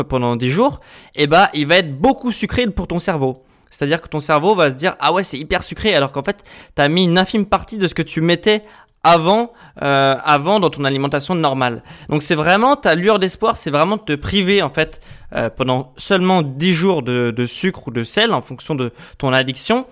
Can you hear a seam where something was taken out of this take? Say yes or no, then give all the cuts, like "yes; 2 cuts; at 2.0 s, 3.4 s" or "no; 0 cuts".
no; 0 cuts